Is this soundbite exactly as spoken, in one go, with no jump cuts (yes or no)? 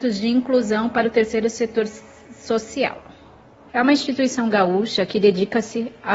no